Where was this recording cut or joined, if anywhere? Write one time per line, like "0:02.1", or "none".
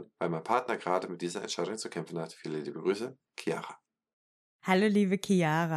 none